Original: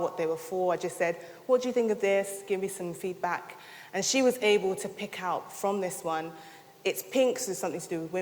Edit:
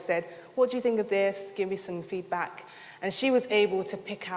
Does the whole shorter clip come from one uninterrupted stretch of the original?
yes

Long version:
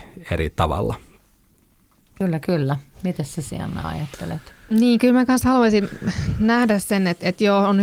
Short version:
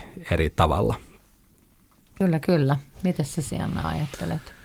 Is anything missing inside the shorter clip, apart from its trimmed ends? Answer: no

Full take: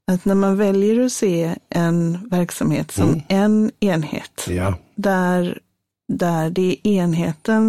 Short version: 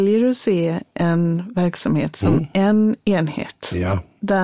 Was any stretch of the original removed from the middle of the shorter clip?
no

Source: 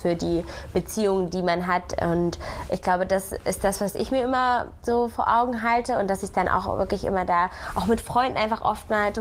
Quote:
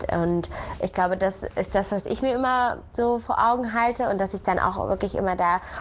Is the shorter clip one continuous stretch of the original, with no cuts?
yes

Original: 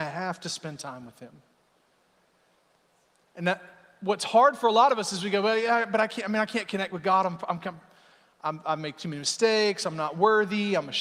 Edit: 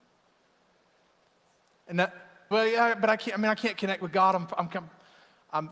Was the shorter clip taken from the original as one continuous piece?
no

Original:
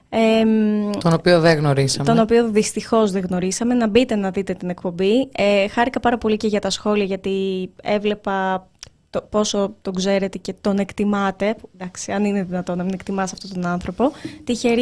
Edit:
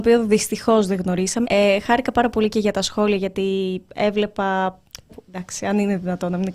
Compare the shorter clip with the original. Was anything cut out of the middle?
yes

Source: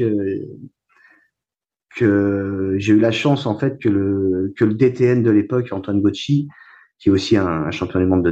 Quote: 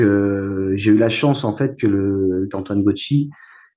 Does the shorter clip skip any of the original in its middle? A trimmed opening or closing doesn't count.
yes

